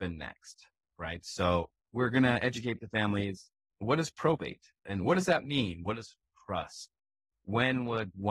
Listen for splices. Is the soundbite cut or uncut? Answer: cut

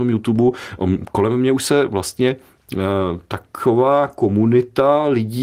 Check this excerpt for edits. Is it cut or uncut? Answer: uncut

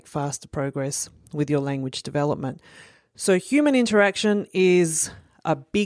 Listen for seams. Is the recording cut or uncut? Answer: uncut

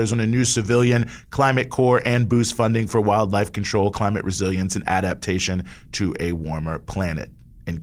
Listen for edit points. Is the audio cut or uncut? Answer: uncut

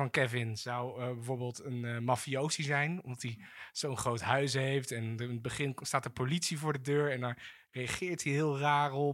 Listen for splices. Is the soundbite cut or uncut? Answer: uncut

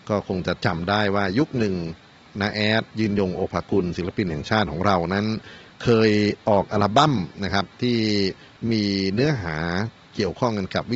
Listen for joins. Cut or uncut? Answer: cut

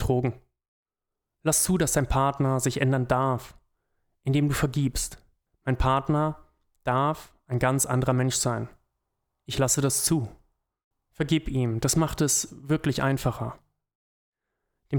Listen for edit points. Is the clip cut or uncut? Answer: cut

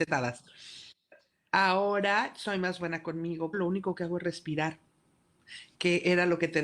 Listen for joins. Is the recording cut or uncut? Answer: cut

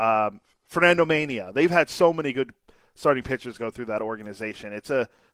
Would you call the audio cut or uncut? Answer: uncut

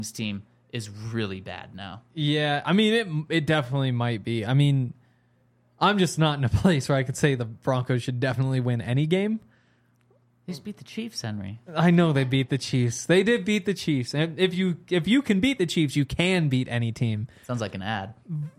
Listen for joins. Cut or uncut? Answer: uncut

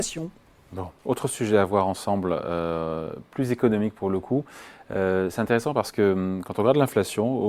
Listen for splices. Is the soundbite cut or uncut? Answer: uncut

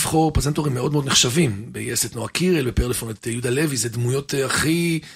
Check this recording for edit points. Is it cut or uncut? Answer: uncut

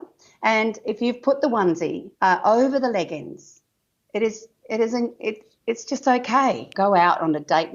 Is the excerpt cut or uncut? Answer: cut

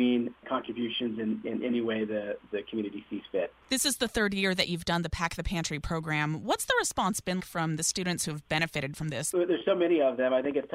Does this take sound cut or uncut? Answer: cut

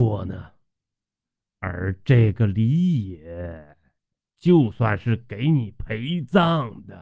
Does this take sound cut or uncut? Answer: uncut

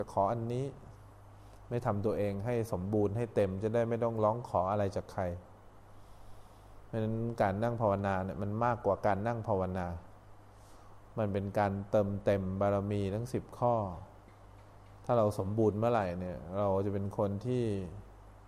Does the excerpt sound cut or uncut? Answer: uncut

